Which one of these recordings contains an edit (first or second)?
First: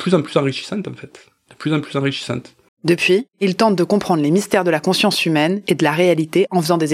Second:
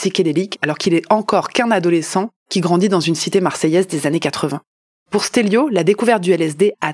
first